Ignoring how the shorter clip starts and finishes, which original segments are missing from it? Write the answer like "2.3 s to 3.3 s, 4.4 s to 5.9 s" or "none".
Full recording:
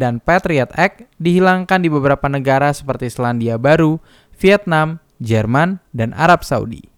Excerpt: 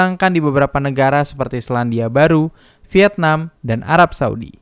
5.0 s to 5.9 s

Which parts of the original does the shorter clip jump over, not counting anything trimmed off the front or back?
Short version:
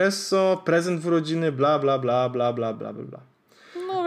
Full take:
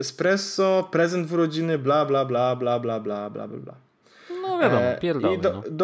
3.0 s to 3.3 s

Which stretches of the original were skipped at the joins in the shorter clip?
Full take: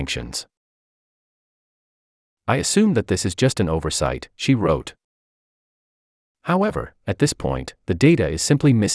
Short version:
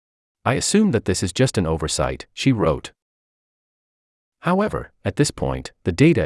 none

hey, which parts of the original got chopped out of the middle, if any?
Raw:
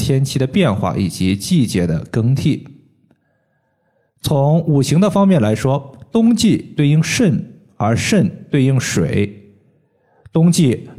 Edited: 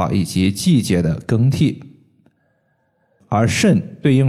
4.0 s to 7.7 s

